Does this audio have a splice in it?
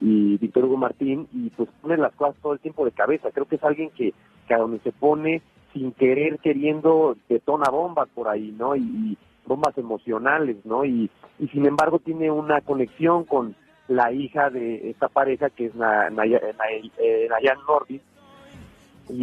no; 0 cuts

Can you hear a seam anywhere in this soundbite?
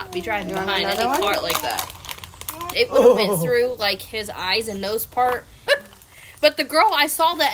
yes; 2 cuts; at 2.7 s, 5.7 s

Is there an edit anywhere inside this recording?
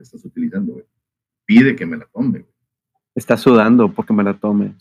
no; 0 cuts

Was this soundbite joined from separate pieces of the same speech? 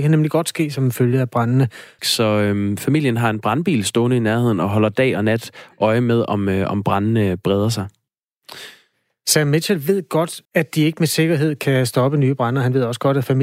yes; 2 cuts; at 2.0 s, 10.5 s

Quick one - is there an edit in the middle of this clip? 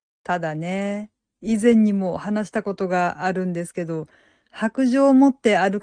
yes; 1 cut; at 1.3 s

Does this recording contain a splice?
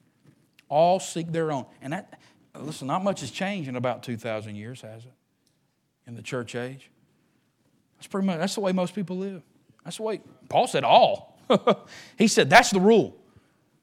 no; 0 cuts

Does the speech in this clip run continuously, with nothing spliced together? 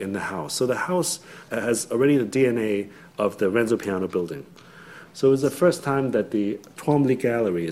no; 2 cuts; at 1.5 s, 5.1 s

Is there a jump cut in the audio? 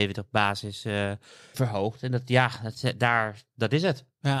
yes; 1 cut; at 1.5 s

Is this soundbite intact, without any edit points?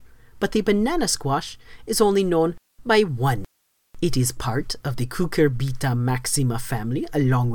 yes; 0 cuts

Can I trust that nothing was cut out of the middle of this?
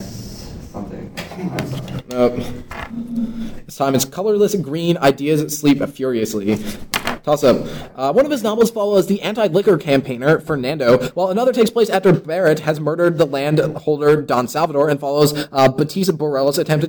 yes; 0 cuts

